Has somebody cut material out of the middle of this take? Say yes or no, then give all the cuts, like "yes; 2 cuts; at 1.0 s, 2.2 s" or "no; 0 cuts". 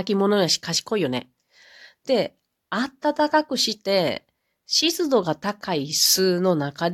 no; 0 cuts